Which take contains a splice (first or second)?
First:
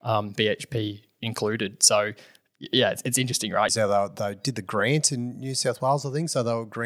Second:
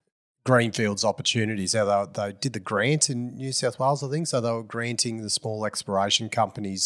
first